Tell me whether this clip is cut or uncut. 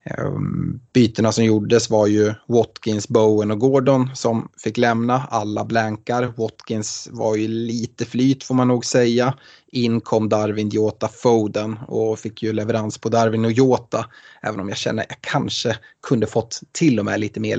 uncut